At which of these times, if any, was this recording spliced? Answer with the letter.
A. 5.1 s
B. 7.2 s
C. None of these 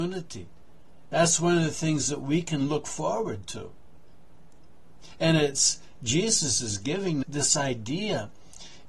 B